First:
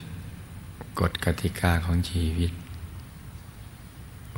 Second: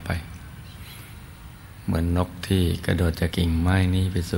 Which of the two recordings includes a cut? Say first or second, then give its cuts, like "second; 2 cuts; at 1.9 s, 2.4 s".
second; 1 cut; at 3.3 s